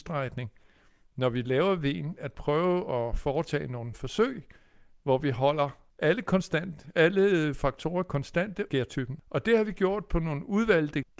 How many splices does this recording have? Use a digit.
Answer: 2